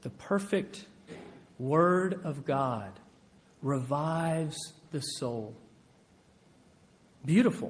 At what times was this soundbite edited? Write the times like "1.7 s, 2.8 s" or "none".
none